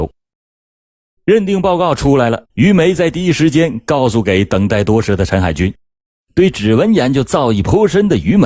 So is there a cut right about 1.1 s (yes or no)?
no